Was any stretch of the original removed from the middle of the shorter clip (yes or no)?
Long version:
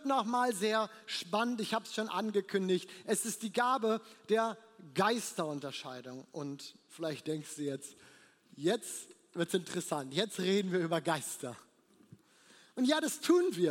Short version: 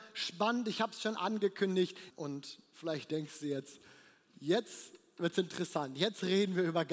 yes